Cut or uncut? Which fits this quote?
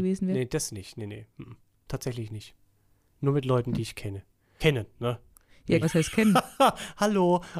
cut